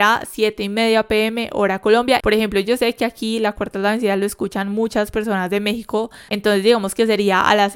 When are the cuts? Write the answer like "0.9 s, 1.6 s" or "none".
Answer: 2.2 s, 6.3 s